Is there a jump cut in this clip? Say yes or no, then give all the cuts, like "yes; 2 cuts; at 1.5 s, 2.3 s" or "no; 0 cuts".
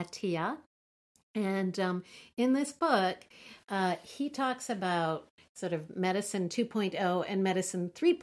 no; 0 cuts